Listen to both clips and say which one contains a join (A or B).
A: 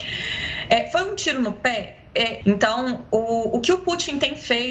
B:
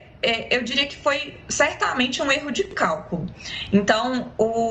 A